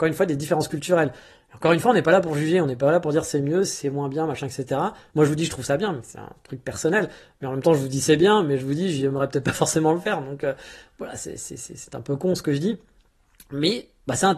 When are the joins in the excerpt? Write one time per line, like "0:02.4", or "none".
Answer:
none